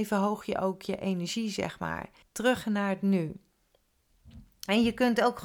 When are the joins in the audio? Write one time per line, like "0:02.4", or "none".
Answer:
0:02.2